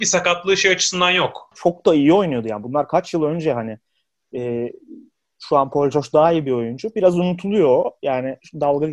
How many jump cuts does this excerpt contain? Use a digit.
1